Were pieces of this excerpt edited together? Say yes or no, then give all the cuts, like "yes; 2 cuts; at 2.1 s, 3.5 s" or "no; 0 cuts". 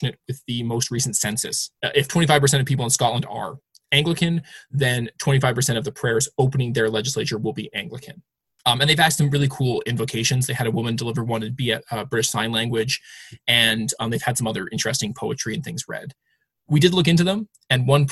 yes; 1 cut; at 1.8 s